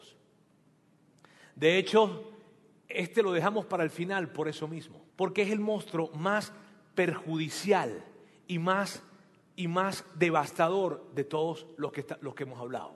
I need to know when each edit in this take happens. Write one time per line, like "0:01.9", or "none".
0:05.1